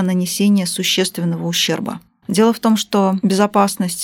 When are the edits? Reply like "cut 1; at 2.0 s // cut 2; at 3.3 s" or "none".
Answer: cut 1; at 2.2 s